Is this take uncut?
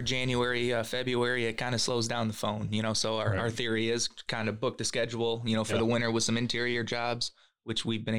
yes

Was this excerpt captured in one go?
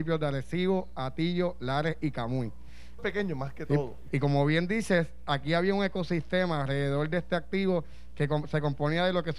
no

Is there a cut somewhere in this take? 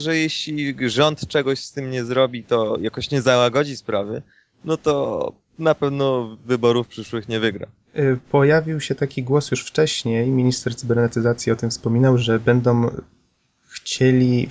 no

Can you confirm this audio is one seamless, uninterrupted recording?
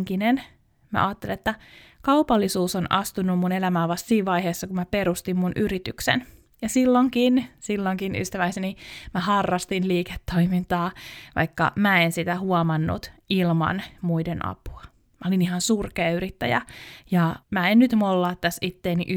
no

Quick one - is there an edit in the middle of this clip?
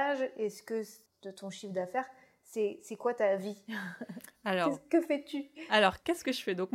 yes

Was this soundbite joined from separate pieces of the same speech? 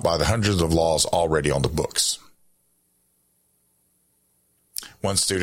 no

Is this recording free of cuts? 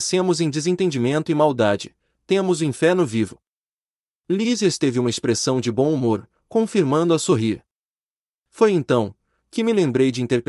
yes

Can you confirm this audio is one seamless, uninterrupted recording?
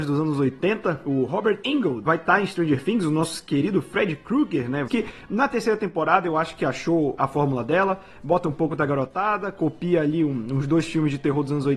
no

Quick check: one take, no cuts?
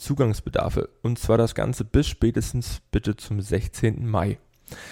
yes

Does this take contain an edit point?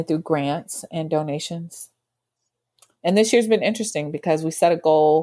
no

